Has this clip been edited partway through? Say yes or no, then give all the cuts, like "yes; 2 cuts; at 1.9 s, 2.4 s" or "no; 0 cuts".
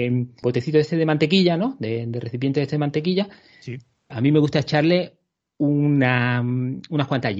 yes; 1 cut; at 4.1 s